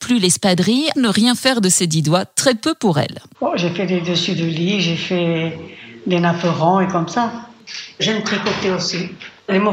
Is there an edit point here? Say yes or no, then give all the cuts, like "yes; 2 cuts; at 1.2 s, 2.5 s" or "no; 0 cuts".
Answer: yes; 2 cuts; at 0.9 s, 3.3 s